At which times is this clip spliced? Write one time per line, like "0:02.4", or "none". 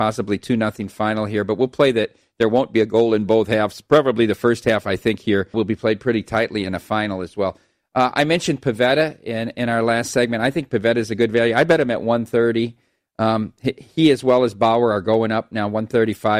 0:05.5